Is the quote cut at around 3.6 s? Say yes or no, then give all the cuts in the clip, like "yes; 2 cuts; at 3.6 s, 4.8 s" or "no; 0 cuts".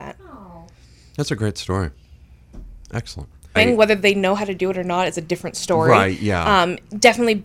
yes; 1 cut; at 3.6 s